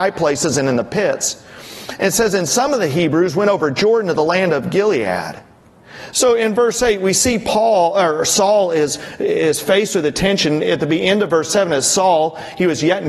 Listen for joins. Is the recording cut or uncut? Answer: cut